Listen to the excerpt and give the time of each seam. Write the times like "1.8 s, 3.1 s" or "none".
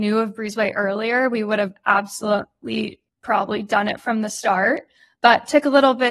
none